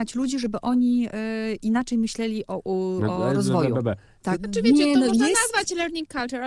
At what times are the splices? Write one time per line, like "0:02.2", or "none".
0:04.3